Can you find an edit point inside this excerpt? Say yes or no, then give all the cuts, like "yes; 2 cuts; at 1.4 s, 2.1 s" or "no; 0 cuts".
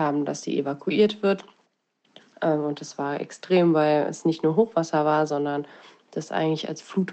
yes; 1 cut; at 2.3 s